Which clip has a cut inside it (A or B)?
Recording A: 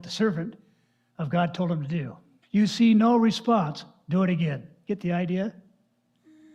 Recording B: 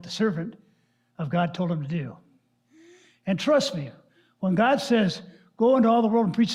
A